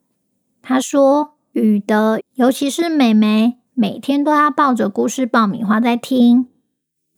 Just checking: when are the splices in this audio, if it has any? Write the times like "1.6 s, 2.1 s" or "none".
2.2 s